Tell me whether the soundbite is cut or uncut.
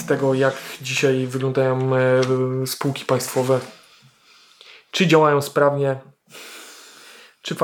uncut